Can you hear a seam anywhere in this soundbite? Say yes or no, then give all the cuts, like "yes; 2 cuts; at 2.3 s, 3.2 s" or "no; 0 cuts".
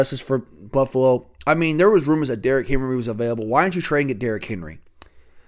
no; 0 cuts